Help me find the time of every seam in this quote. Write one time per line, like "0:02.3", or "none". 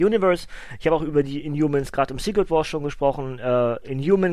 none